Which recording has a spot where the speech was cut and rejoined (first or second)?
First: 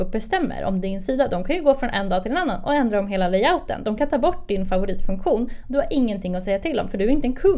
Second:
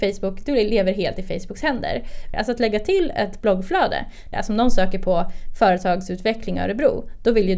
second